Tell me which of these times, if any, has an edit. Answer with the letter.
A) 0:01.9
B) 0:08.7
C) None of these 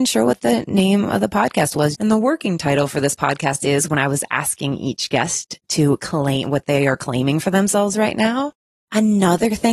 A